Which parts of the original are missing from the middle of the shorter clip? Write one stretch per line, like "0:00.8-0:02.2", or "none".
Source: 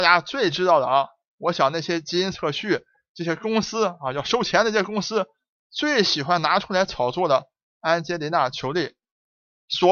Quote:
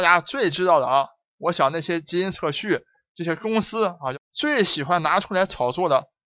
0:04.1-0:05.5

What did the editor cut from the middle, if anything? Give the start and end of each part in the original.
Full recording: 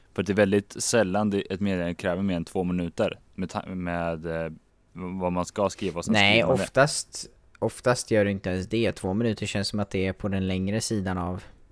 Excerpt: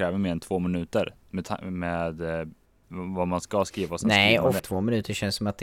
0:06.6-0:08.9

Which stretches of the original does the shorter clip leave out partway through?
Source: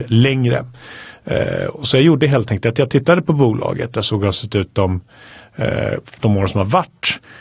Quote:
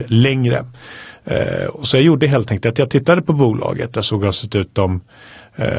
none

